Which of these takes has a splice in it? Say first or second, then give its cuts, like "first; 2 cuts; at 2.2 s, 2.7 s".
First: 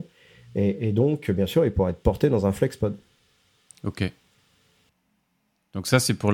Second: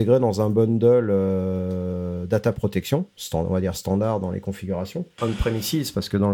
second; 1 cut; at 5.2 s